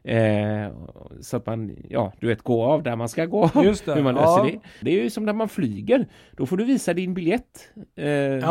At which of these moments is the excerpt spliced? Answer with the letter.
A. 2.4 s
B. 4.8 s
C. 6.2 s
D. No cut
B